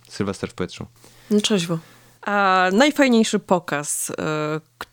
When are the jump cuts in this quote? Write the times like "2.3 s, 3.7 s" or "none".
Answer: 2.1 s